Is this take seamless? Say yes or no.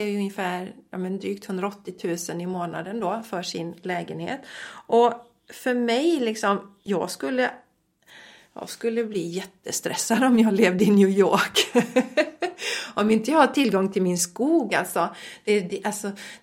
yes